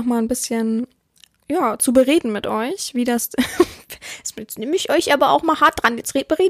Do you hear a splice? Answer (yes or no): no